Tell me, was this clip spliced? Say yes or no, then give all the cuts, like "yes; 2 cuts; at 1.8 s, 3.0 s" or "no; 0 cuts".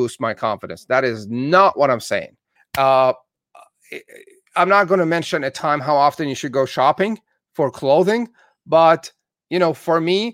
yes; 1 cut; at 2.6 s